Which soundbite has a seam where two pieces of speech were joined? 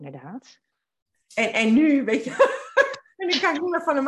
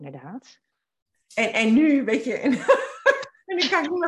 first; 1 cut; at 2.3 s

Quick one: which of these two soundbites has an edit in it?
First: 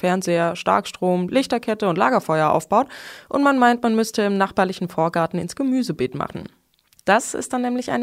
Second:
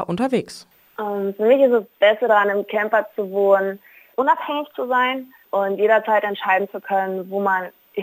second; 1 cut; at 4.1 s

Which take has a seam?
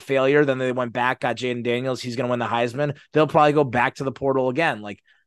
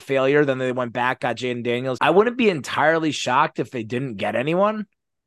second; 1 cut; at 2.0 s

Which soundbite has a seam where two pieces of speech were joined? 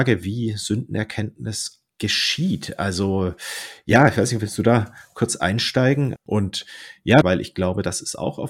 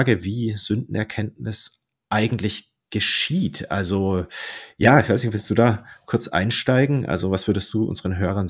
first; 3 cuts; at 1.9 s, 6.2 s, 7.2 s

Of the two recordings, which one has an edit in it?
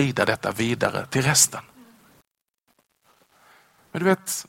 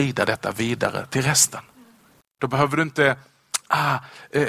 second; 1 cut; at 2.4 s

